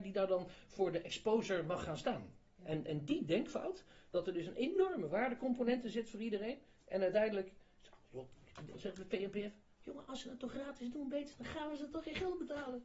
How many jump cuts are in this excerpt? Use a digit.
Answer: 1